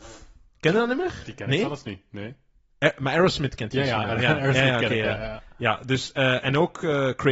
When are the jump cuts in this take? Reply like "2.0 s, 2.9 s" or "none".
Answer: none